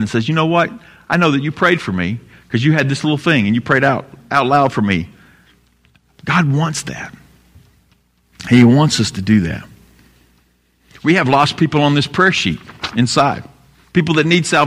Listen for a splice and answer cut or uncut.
uncut